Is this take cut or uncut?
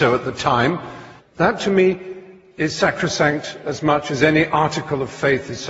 cut